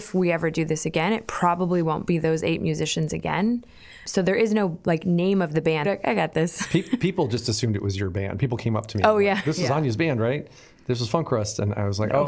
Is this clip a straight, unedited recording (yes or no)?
no